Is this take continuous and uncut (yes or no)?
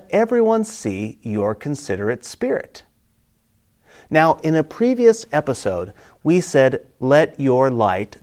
yes